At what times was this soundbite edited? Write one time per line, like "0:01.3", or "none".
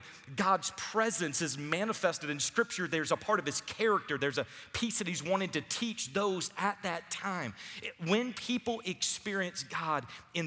none